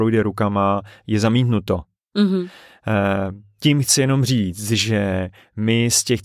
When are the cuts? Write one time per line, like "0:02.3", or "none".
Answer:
none